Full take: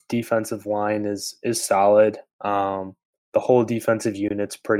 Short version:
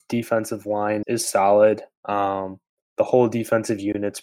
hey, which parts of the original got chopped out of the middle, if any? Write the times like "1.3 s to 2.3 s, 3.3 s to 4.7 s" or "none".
1.0 s to 1.4 s